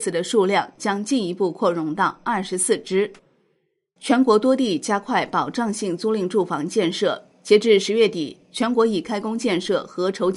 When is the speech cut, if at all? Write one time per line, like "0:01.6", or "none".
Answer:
0:04.0